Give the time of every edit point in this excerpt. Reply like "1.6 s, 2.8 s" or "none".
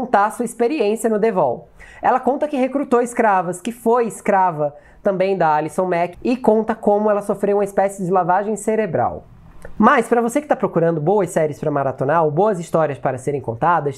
6.1 s, 9.8 s